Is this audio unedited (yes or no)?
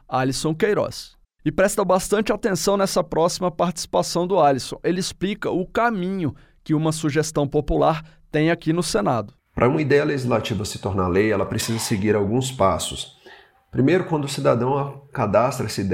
no